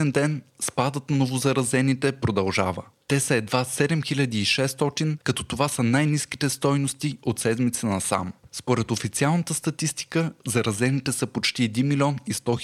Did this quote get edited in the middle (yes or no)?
yes